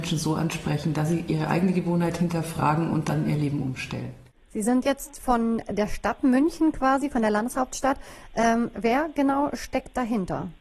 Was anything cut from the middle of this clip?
no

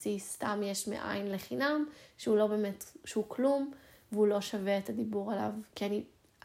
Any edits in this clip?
no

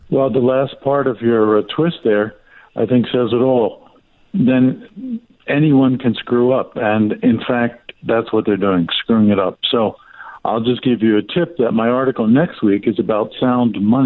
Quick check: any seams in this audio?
no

